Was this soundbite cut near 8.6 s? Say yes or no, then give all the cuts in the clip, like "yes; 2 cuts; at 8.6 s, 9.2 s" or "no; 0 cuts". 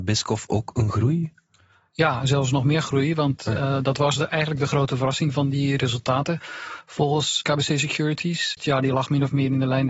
yes; 1 cut; at 8.6 s